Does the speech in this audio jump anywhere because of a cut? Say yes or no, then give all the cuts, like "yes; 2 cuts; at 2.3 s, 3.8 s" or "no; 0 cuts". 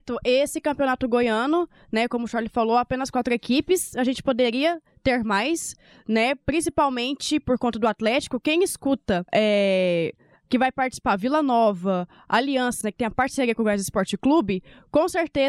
yes; 2 cuts; at 9.3 s, 12.8 s